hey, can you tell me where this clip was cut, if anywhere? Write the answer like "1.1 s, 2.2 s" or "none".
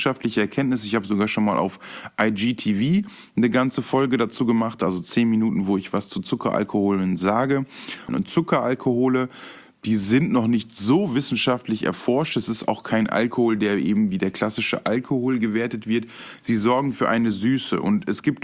8.1 s